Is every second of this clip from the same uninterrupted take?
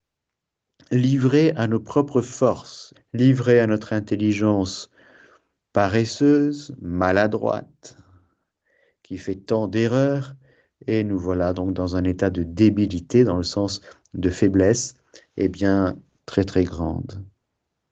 no; 1 cut; at 2.9 s

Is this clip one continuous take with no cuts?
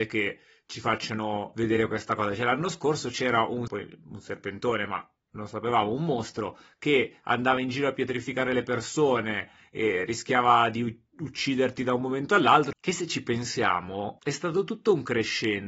no; 2 cuts; at 3.7 s, 12.7 s

